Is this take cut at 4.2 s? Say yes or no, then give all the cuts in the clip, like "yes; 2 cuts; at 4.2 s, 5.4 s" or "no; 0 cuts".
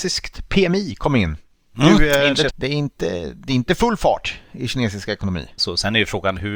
no; 2 cuts; at 2.5 s, 5.6 s